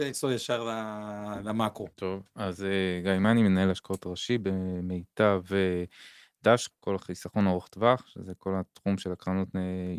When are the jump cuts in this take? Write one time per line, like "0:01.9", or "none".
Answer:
0:01.9

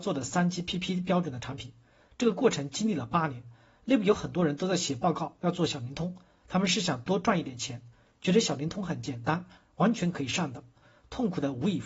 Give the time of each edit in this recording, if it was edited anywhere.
0:10.8

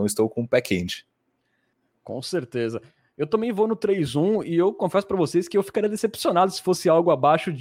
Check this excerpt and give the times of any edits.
none

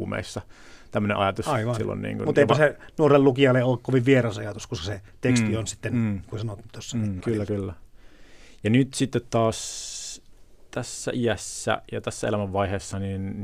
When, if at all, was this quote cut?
0:07.2

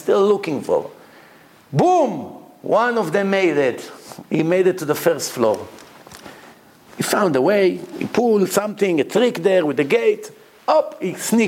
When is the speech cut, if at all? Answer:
none

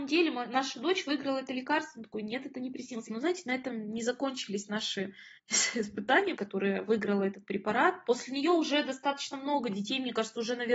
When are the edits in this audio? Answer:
0:03.1
0:06.3

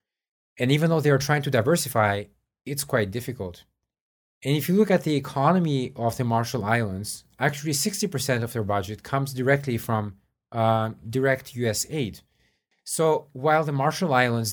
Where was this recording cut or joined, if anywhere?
0:12.7

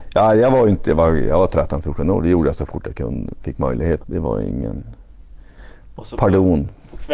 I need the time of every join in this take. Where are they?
0:04.0

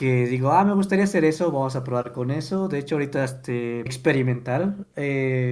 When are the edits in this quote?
0:03.9

